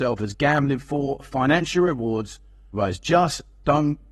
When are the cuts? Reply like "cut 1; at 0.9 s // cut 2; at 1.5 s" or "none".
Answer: cut 1; at 2.7 s